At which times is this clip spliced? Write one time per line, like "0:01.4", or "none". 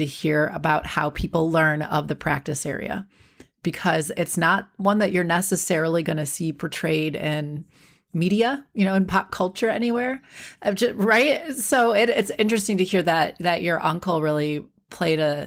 none

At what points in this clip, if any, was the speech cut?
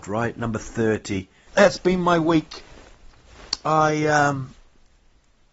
0:01.5

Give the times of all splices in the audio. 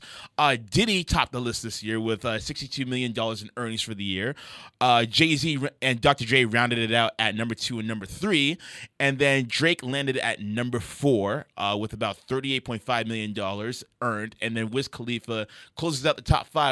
none

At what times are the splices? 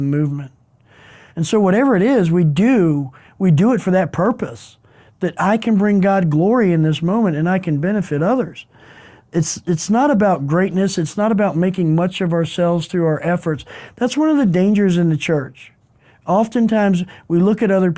0:01.3

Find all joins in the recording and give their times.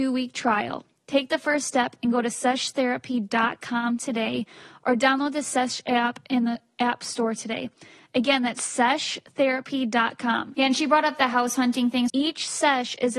0:10.5
0:12.1

